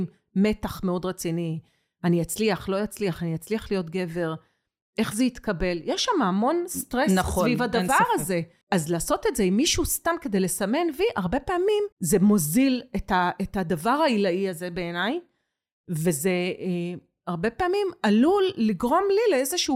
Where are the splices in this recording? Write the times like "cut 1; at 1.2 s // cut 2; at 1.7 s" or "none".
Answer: cut 1; at 8.6 s // cut 2; at 11.9 s